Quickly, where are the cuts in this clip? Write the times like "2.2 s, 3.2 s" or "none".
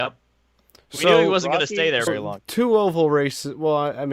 2.1 s